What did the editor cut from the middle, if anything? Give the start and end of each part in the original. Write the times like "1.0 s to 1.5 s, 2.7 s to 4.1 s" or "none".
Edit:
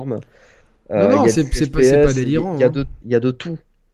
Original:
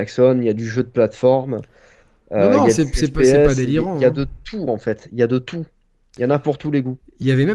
4.4 s to 5.1 s